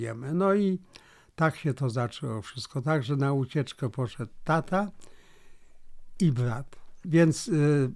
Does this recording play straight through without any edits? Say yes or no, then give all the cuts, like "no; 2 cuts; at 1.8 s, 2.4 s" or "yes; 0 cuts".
no; 1 cut; at 7.0 s